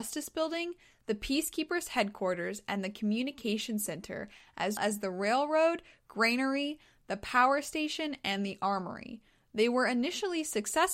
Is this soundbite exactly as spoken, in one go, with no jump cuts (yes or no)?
no